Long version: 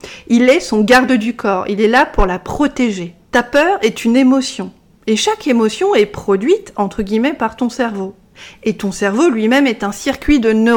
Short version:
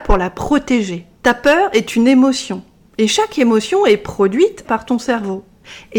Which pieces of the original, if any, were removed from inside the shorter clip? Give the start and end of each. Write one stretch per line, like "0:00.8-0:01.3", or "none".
0:06.7-0:07.4